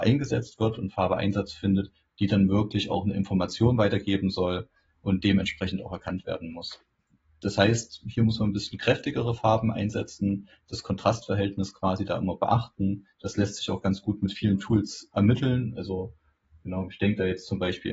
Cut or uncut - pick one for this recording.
uncut